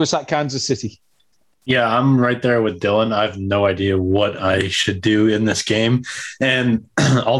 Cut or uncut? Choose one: uncut